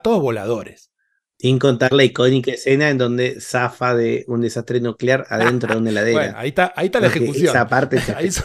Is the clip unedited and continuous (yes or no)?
yes